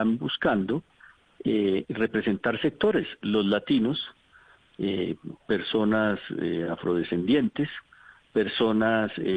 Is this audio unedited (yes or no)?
yes